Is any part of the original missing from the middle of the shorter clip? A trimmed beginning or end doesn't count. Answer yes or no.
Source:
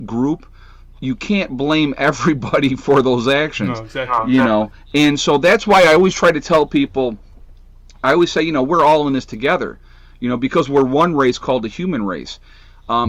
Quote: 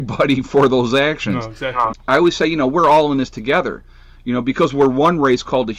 yes